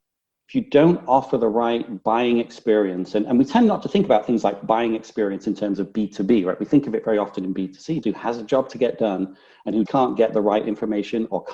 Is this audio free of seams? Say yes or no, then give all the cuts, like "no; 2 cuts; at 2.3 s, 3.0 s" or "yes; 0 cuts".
no; 2 cuts; at 8.0 s, 9.9 s